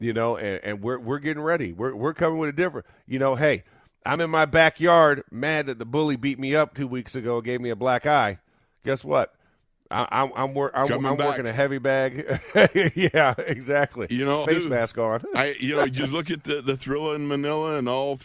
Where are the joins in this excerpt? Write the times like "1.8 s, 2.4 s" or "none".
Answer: 14.4 s